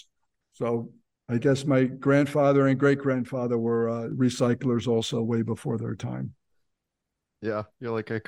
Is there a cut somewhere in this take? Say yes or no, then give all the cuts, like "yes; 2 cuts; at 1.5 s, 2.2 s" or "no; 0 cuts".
no; 0 cuts